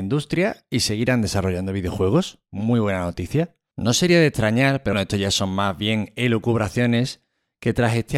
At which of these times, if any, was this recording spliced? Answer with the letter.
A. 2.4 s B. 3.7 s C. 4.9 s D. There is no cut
C